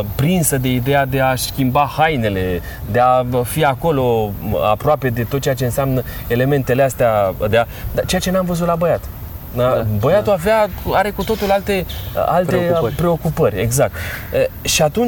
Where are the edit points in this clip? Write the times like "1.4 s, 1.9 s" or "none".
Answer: 7.5 s